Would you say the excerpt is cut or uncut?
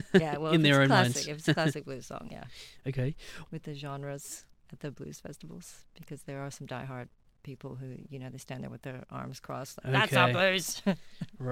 cut